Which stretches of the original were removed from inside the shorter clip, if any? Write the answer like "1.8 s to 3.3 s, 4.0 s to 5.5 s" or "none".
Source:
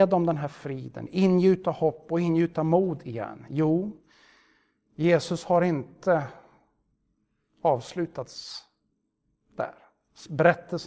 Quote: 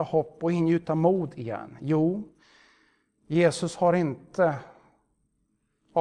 none